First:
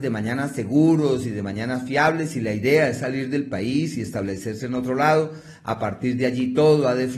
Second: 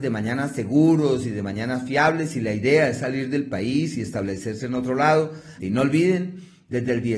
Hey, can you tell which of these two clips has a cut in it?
second; 1 cut; at 5.6 s

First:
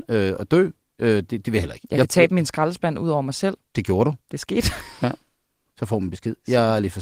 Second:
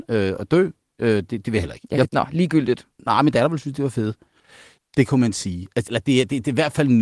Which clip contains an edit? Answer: second; 3 cuts; at 2.1 s, 4.8 s, 5.9 s

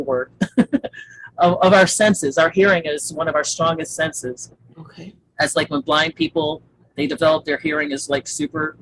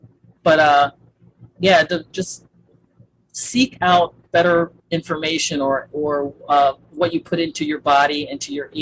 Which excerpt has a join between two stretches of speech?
second; 2 cuts; at 2.1 s, 4.8 s

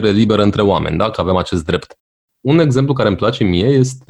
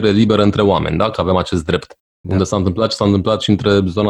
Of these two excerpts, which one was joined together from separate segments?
second; 1 cut; at 2.2 s

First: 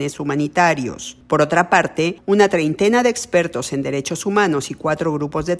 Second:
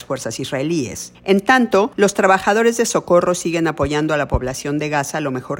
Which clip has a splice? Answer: second; 1 cut; at 1.1 s

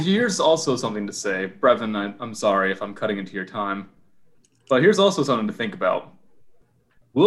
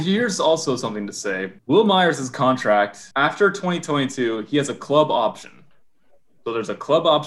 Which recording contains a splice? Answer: second; 2 cuts; at 1.6 s, 3.1 s

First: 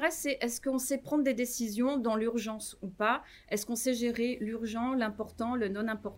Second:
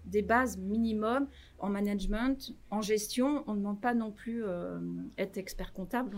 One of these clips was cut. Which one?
second; 1 cut; at 1.6 s

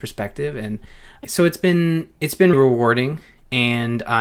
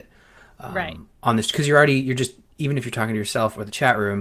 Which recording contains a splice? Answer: first; 2 cuts; at 1.2 s, 2.5 s

